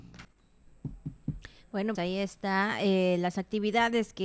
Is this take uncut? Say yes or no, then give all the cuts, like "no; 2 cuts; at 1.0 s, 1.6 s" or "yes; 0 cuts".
no; 1 cut; at 1.9 s